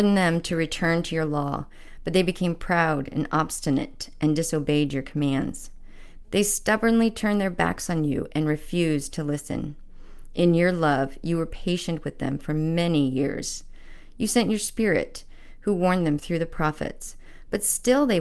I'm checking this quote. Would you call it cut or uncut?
cut